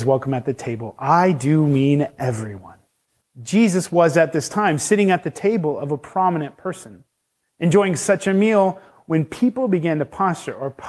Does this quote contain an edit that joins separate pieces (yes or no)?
yes